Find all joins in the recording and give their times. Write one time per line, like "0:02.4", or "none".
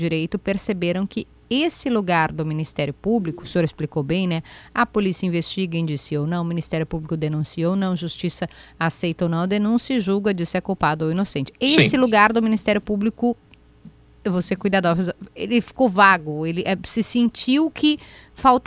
0:11.5